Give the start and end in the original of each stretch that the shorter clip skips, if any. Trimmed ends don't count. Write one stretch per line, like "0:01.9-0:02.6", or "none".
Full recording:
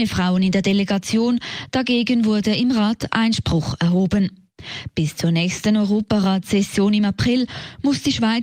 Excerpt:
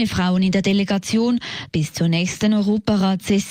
0:01.7-0:04.9